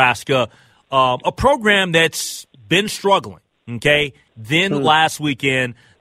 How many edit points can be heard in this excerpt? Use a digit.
1